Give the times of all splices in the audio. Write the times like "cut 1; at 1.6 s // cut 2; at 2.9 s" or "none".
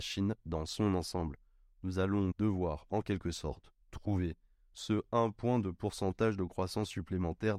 cut 1; at 2.3 s